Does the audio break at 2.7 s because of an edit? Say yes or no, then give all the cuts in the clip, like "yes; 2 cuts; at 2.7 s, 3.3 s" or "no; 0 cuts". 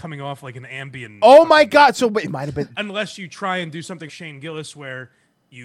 yes; 2 cuts; at 2.7 s, 4.1 s